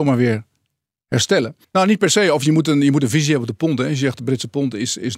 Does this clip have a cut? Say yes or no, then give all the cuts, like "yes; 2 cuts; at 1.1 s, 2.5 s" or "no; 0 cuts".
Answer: yes; 1 cut; at 1.6 s